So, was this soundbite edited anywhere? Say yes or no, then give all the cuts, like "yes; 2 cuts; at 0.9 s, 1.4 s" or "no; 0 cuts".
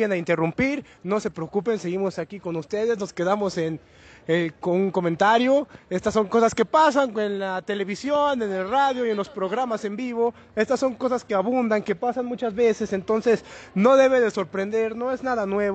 no; 0 cuts